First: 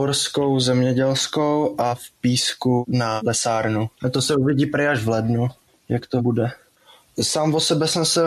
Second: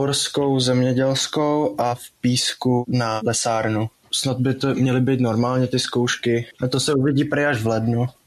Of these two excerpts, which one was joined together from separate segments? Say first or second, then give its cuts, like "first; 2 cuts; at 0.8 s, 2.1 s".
first; 2 cuts; at 4.0 s, 6.7 s